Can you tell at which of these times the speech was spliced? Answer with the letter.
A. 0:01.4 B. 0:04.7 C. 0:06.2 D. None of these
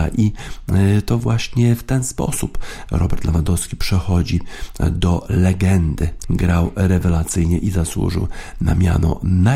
C